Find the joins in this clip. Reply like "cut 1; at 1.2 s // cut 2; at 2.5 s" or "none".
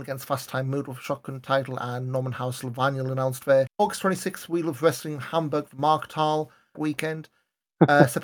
cut 1; at 3.7 s // cut 2; at 6.7 s